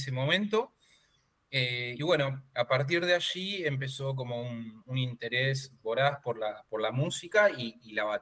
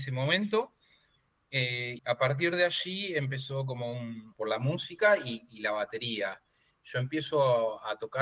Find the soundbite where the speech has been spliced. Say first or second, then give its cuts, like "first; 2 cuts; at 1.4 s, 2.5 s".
second; 2 cuts; at 2.0 s, 4.3 s